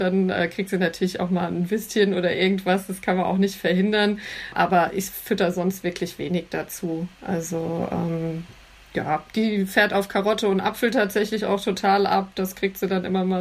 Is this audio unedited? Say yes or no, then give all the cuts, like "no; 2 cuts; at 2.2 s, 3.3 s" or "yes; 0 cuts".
yes; 0 cuts